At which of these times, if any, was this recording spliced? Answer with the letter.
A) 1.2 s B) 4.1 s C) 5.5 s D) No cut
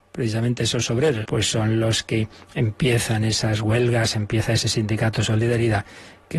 A